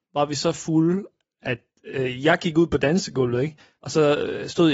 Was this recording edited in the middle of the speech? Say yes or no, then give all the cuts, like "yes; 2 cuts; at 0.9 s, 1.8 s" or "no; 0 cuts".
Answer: no; 0 cuts